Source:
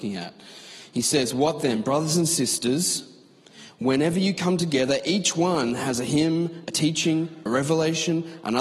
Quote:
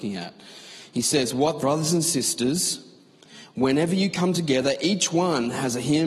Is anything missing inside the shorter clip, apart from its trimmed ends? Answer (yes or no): yes